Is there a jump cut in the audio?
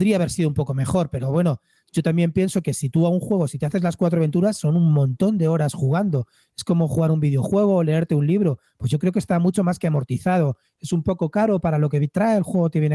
no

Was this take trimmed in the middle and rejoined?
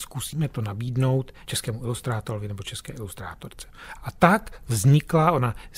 yes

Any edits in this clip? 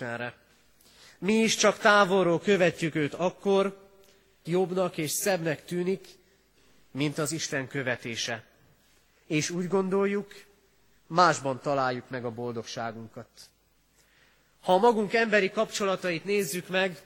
yes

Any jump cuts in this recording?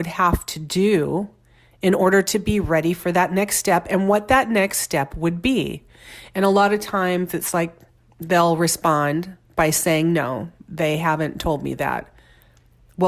no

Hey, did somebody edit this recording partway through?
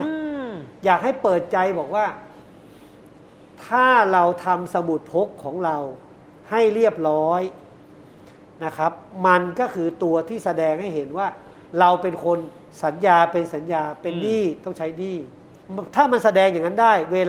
no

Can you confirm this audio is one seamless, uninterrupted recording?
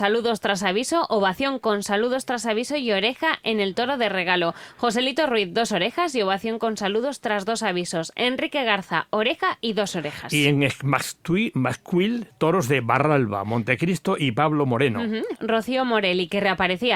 no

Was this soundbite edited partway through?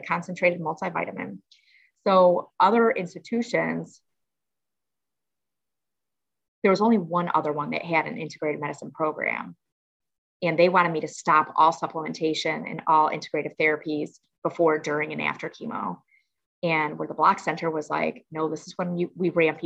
no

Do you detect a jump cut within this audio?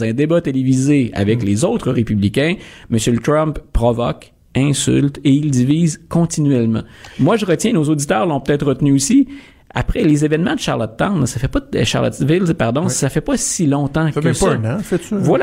no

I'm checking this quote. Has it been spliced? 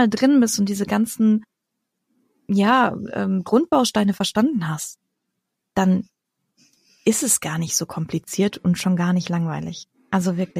no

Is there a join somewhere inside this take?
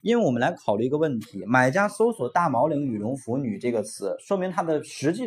no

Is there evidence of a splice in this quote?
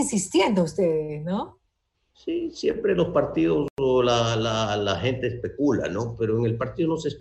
no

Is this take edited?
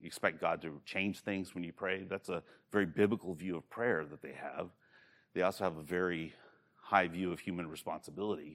no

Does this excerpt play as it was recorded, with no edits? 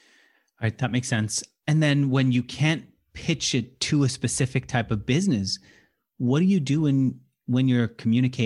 yes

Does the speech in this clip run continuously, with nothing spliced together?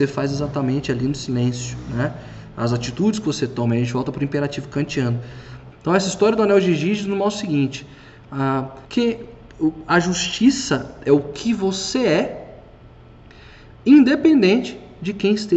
no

